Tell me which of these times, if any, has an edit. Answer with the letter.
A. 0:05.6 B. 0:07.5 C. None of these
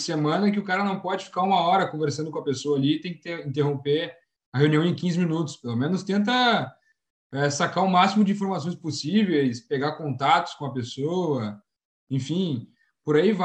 C